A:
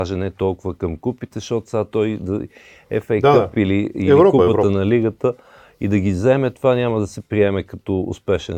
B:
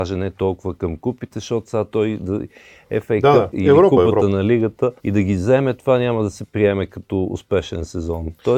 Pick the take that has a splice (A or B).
B